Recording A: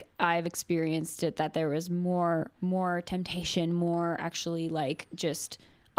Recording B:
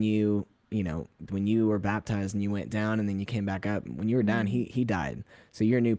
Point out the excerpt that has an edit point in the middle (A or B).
B